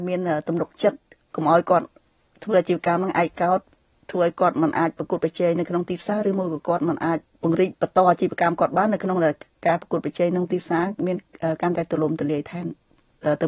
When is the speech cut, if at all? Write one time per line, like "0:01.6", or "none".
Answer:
none